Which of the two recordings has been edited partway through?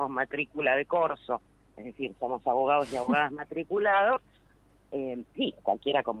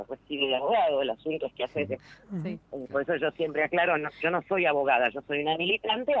second; 1 cut; at 2.0 s

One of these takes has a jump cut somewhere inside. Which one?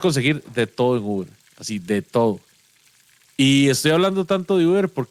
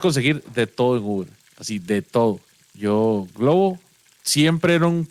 second; 1 cut; at 2.6 s

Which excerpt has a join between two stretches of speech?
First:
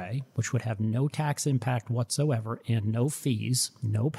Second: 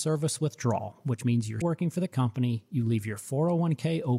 second; 1 cut; at 1.6 s

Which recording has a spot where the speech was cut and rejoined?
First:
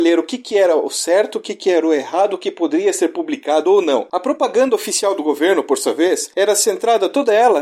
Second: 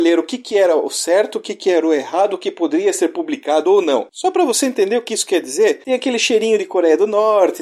second; 1 cut; at 4.1 s

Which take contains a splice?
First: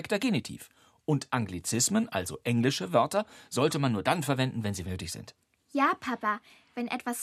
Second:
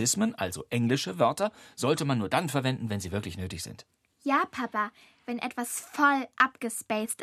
first; 1 cut; at 4.8 s

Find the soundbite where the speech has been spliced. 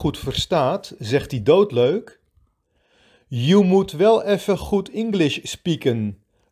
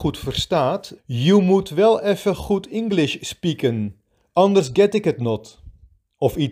second; 1 cut; at 1.0 s

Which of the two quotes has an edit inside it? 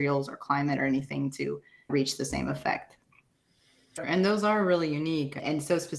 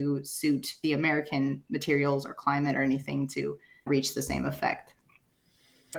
first; 1 cut; at 4.0 s

